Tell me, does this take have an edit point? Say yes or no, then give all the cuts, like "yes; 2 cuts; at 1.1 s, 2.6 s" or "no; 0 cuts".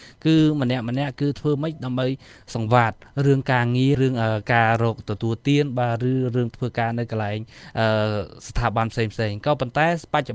yes; 1 cut; at 3.9 s